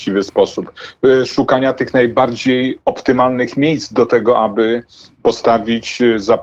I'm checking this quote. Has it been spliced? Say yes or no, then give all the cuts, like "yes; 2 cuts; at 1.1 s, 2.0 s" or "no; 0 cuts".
no; 0 cuts